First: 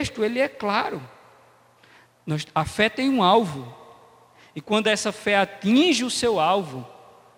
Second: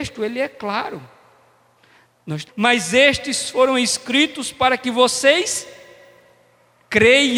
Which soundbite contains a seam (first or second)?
second